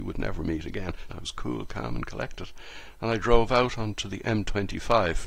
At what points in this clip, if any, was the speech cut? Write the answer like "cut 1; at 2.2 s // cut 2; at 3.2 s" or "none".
cut 1; at 1.1 s